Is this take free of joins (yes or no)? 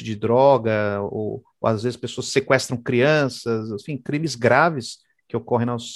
yes